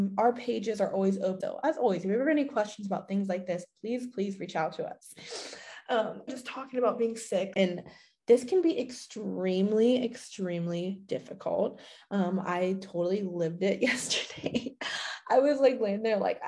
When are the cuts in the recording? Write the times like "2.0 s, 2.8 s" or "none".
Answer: 1.4 s, 6.3 s, 7.5 s